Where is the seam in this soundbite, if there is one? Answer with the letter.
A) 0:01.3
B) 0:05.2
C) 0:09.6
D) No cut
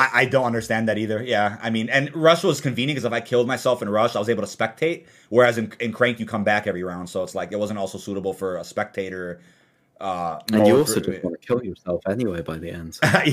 D